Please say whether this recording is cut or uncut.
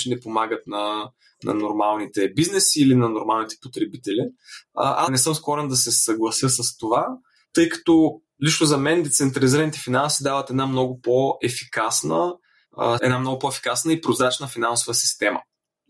cut